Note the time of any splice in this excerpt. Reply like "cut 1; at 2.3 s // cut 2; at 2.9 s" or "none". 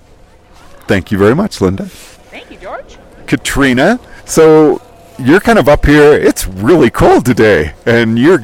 cut 1; at 4.2 s